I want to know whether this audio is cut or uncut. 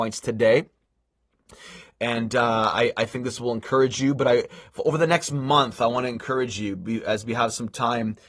uncut